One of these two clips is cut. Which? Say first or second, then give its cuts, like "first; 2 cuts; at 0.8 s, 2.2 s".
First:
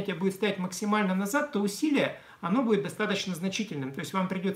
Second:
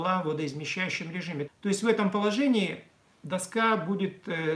second; 1 cut; at 1.5 s